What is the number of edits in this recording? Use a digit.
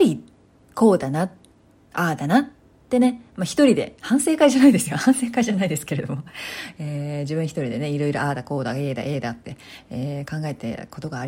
0